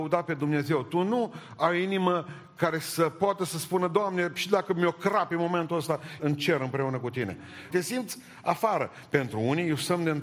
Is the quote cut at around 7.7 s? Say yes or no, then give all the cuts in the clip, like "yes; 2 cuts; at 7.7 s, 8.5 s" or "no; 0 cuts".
yes; 2 cuts; at 6.2 s, 7.7 s